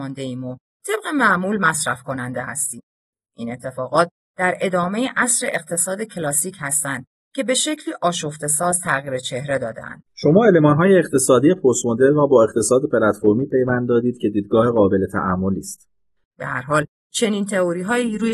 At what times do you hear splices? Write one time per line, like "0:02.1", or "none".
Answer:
0:10.1
0:16.2